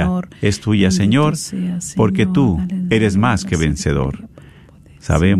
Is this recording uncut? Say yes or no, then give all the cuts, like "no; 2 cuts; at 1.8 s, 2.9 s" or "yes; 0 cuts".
yes; 0 cuts